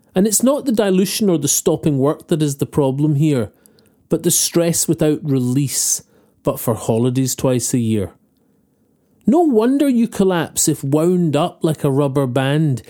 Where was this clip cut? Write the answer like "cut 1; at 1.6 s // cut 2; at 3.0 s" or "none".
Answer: none